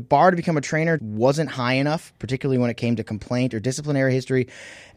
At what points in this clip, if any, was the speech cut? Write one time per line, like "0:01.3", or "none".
0:01.0

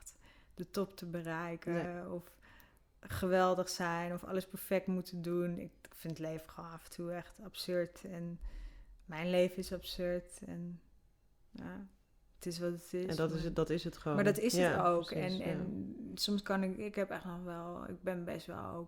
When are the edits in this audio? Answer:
none

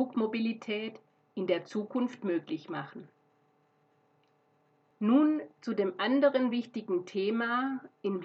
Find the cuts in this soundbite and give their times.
none

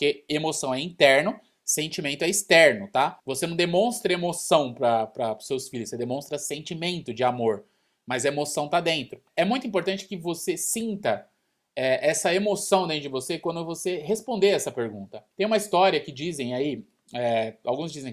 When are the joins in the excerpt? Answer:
none

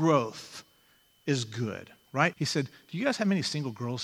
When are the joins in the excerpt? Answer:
0:02.3

